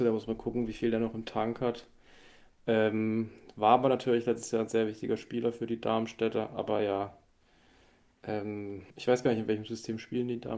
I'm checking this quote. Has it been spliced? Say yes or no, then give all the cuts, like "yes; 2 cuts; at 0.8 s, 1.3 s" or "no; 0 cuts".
yes; 1 cut; at 8.9 s